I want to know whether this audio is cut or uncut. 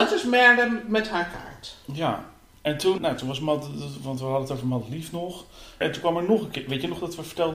cut